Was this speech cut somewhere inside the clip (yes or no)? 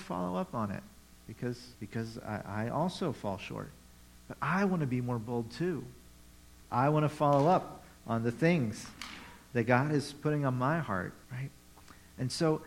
yes